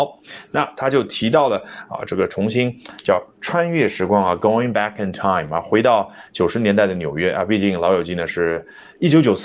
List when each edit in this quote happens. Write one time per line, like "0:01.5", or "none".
none